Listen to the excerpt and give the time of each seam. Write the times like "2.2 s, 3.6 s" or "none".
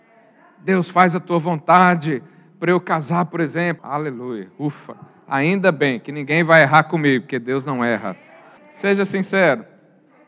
3.8 s, 8.6 s